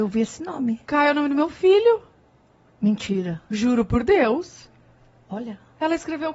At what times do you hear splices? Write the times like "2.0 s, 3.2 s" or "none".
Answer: none